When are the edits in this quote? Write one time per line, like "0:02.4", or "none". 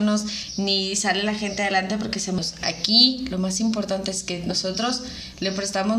none

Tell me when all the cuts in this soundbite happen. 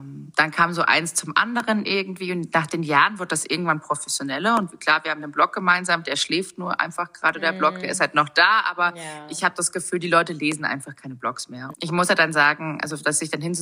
0:11.7

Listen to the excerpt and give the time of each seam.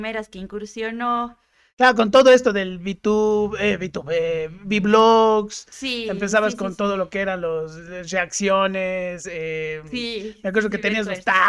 none

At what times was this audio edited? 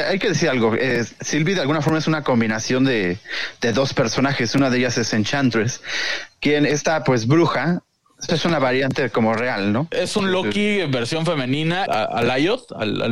0:08.3
0:11.9

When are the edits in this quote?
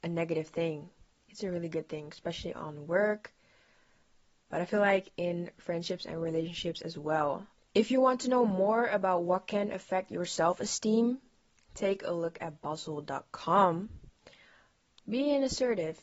0:15.0

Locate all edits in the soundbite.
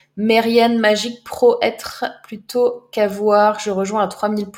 none

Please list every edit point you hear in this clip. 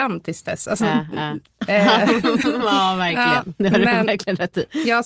0:01.4

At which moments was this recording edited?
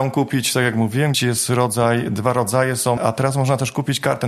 0:01.1
0:03.0

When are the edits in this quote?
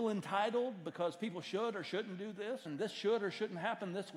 0:02.7

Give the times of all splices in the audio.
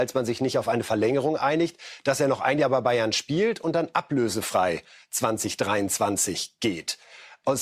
none

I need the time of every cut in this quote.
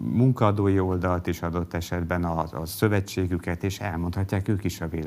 none

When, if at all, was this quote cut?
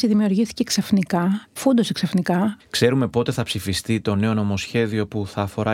0:02.6

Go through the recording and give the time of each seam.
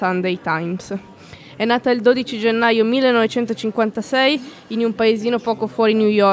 none

